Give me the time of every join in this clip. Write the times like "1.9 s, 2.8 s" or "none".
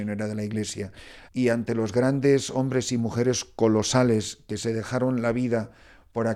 1.3 s